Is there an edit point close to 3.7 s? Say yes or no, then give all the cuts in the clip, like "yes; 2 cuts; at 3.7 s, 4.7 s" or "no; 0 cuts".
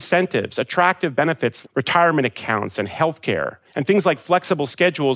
yes; 2 cuts; at 1.6 s, 3.7 s